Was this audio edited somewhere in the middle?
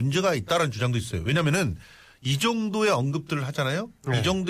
no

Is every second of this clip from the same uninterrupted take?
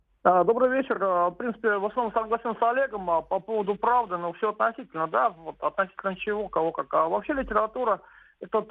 yes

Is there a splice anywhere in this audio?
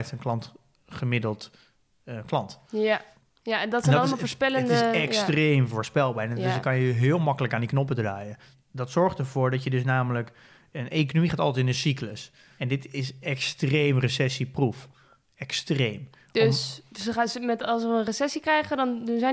no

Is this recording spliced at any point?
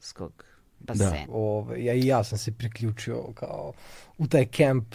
yes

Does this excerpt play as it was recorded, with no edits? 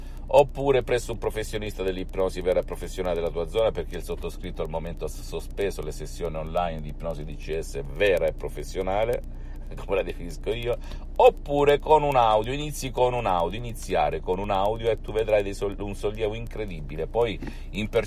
yes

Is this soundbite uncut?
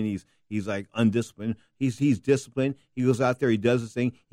yes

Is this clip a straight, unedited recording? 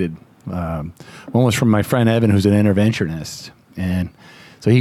yes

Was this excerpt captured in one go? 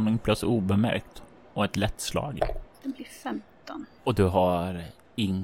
yes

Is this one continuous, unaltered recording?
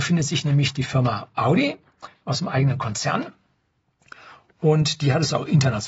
yes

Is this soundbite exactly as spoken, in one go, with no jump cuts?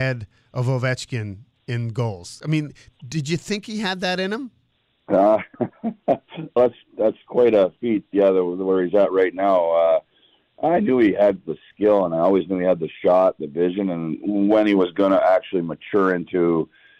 no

